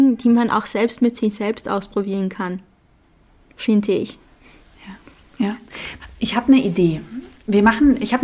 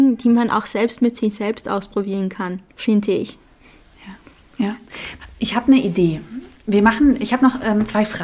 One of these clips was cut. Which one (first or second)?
second